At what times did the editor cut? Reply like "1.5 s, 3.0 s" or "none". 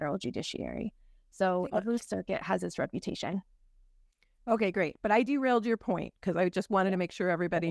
1.7 s